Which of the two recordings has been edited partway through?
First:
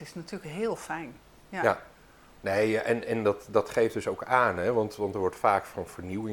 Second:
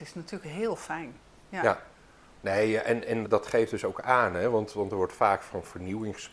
second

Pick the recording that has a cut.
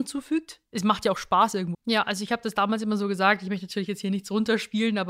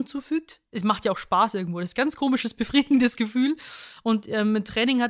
first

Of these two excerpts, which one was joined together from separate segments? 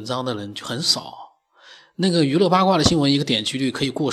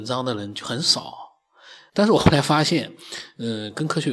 second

